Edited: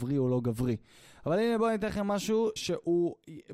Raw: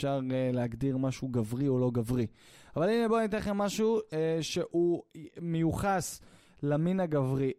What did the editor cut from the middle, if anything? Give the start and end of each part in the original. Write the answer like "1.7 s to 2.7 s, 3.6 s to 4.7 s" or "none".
4.1 s to 4.4 s